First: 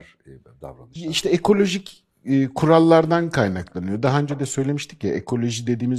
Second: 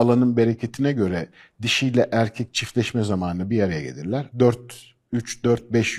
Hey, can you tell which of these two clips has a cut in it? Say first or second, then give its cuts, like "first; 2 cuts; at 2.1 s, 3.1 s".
second; 1 cut; at 4.3 s